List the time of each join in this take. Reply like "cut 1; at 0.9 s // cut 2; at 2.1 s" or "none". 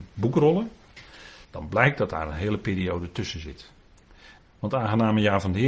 cut 1; at 1.4 s // cut 2; at 4.4 s